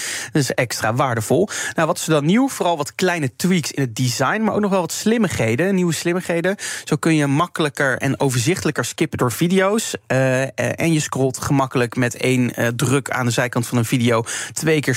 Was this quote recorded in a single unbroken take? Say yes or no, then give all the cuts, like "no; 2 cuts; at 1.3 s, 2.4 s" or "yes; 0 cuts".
yes; 0 cuts